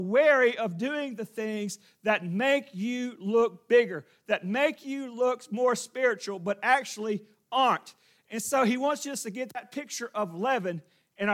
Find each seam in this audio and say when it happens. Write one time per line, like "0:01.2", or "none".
none